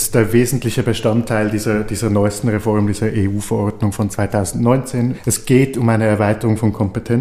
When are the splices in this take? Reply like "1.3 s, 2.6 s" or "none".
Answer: none